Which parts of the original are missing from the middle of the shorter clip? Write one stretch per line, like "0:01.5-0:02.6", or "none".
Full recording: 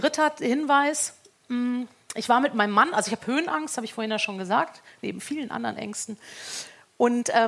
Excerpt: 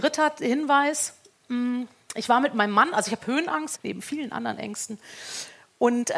0:03.8-0:04.9